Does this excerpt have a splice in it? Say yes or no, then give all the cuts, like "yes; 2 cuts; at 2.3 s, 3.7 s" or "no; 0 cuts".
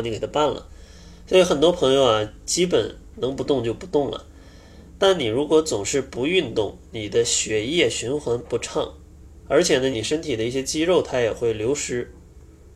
yes; 1 cut; at 9.9 s